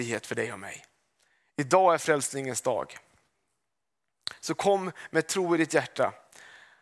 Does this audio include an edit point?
no; 0 cuts

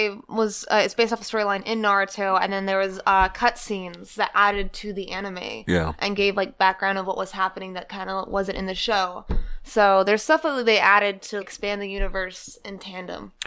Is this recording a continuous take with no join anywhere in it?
no; 1 cut; at 11.4 s

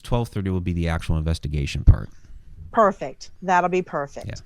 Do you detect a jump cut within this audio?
no; 0 cuts

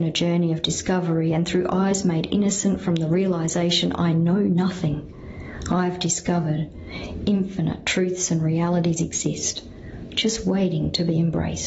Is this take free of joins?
yes; 0 cuts

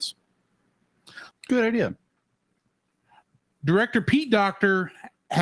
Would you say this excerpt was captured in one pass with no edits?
no; 1 cut; at 1.3 s

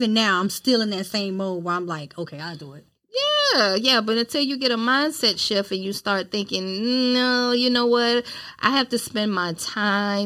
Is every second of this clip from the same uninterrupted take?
yes; 0 cuts

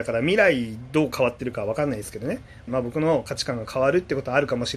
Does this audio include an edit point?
yes; 1 cut; at 2.7 s

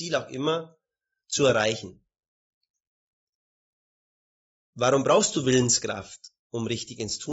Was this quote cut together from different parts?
yes; 1 cut; at 6.4 s

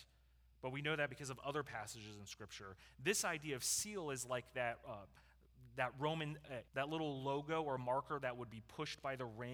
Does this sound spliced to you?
yes; 1 cut; at 6.7 s

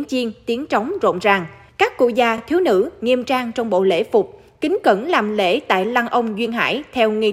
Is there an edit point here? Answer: no; 0 cuts

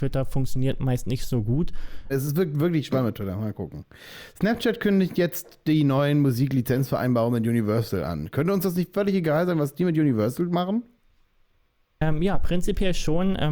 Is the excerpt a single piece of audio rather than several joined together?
no; 1 cut; at 2.1 s

